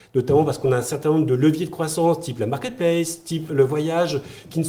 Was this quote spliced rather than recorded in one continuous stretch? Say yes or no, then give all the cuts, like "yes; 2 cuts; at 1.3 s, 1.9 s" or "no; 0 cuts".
yes; 1 cut; at 3.5 s